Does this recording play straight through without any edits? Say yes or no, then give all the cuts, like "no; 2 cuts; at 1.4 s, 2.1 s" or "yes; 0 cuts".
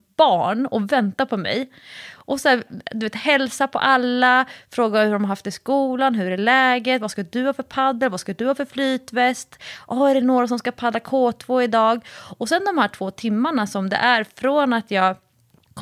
no; 1 cut; at 2.7 s